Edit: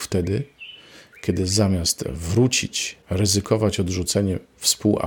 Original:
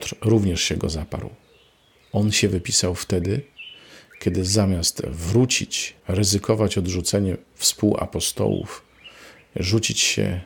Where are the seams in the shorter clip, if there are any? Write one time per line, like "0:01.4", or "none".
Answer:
none

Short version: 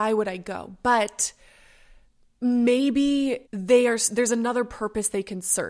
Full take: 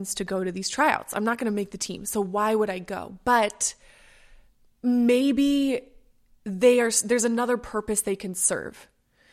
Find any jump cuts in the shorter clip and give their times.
0:03.4

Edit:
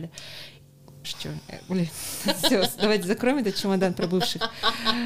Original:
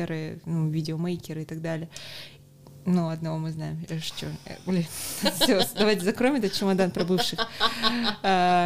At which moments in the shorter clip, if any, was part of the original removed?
0:01.0

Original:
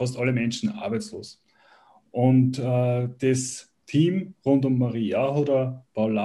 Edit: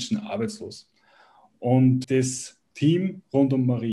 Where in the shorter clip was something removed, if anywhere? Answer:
0:02.0

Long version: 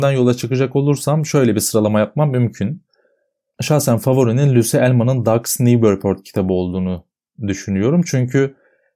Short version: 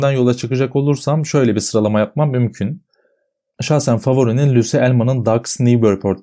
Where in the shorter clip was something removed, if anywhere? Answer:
none

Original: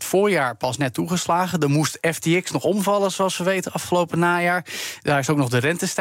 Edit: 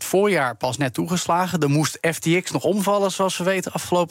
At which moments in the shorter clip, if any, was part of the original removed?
none

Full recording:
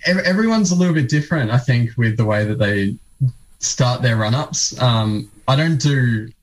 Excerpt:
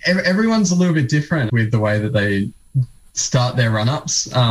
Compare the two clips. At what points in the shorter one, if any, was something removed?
0:01.5

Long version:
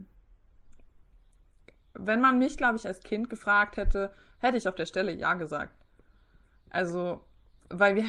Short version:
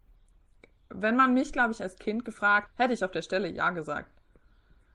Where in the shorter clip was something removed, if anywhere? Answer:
0:02.7

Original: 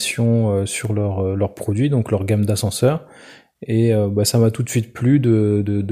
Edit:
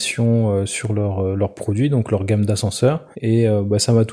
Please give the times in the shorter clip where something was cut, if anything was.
0:03.1

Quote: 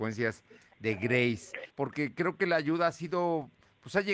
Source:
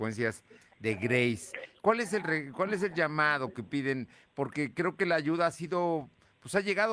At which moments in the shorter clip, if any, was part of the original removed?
0:01.7

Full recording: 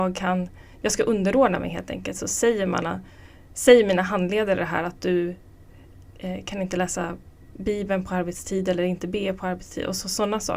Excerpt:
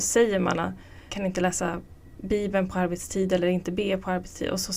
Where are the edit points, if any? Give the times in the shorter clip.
0:01.1

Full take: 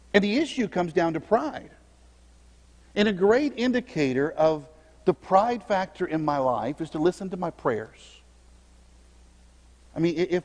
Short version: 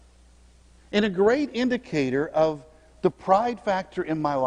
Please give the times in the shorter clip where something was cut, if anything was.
none

